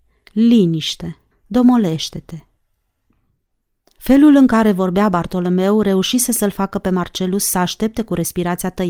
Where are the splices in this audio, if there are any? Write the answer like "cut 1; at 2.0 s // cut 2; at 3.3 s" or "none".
cut 1; at 1.3 s